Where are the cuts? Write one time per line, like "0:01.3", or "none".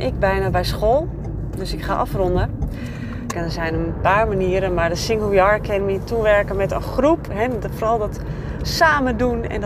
0:03.3